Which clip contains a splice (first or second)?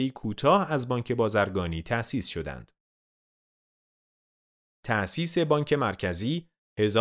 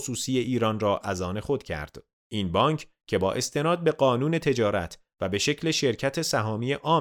second